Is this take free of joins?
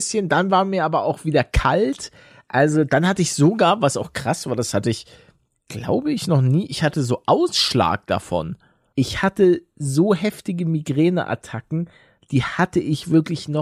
no; 1 cut; at 8.9 s

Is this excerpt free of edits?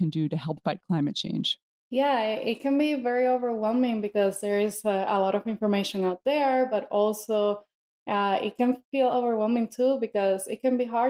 yes; 0 cuts

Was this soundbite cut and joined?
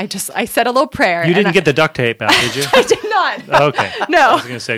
no; 0 cuts

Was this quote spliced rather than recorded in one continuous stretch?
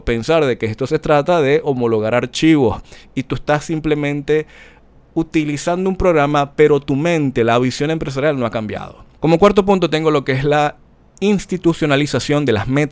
yes; 1 cut; at 9.1 s

